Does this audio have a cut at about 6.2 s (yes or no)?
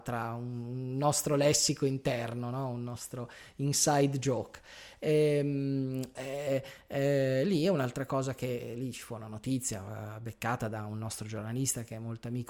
yes